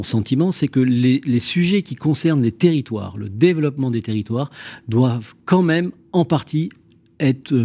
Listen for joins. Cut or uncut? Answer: uncut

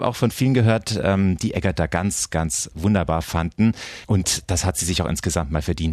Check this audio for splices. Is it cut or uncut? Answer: uncut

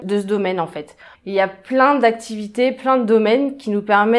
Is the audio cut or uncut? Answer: cut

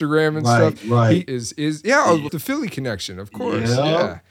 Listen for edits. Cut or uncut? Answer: cut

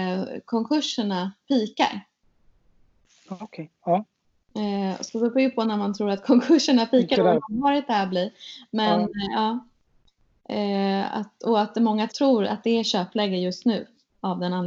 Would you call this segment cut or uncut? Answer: cut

